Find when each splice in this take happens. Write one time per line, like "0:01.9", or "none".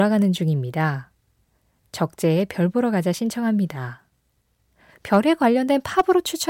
none